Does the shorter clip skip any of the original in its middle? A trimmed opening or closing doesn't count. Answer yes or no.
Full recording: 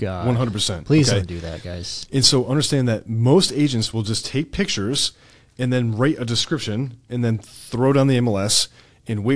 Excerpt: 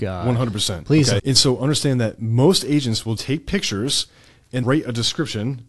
yes